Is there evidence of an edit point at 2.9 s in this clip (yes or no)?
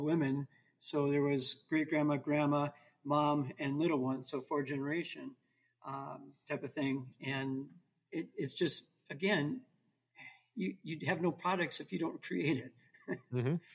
no